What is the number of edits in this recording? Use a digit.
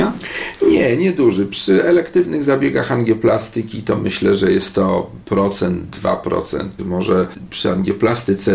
1